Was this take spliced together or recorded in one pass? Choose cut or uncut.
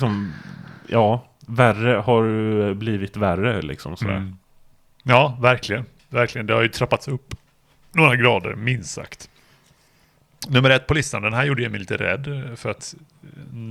uncut